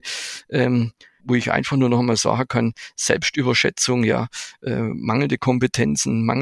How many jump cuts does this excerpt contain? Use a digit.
1